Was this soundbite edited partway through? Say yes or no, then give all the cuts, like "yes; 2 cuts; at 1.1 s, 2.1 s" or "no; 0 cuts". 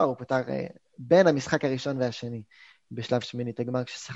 no; 0 cuts